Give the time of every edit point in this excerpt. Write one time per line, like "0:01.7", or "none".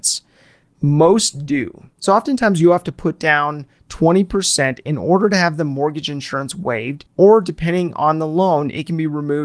0:01.9
0:07.1